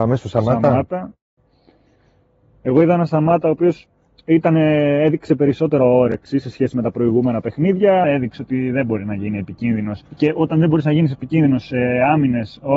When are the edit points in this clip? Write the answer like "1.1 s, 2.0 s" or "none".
8.0 s, 10.1 s